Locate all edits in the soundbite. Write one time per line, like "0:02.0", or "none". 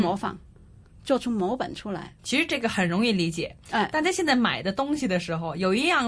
0:02.2